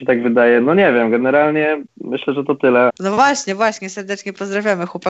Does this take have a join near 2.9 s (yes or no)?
yes